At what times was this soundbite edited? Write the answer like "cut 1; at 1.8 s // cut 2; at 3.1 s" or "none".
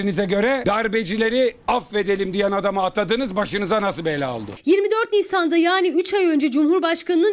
none